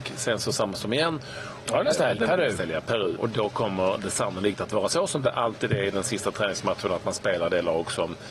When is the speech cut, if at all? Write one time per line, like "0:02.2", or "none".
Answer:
0:01.7
0:03.2